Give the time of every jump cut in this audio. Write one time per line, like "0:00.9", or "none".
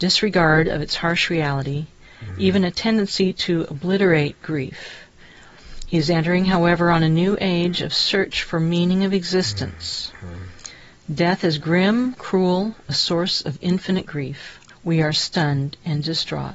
0:12.1
0:14.7